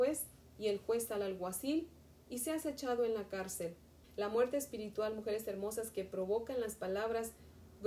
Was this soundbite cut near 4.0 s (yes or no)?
yes